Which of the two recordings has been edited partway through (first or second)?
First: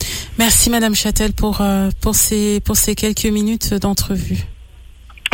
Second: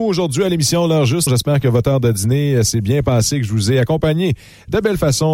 second